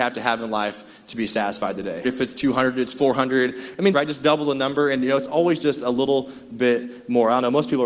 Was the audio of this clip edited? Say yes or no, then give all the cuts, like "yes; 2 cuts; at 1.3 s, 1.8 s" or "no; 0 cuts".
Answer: yes; 2 cuts; at 2.0 s, 3.9 s